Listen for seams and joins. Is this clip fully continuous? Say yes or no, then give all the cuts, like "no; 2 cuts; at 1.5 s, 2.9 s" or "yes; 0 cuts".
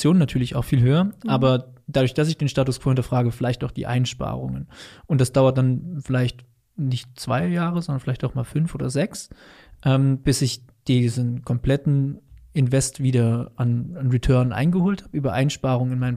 yes; 0 cuts